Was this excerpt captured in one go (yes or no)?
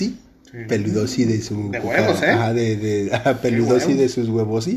yes